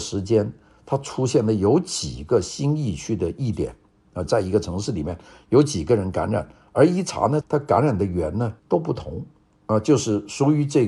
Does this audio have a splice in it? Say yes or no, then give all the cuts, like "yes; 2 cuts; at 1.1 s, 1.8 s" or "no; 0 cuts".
yes; 3 cuts; at 4.3 s, 7.4 s, 8.6 s